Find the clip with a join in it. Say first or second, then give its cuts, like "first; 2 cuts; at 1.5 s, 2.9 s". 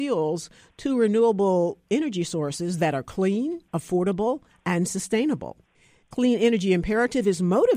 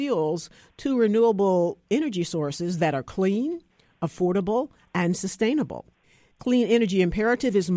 first; 1 cut; at 3.7 s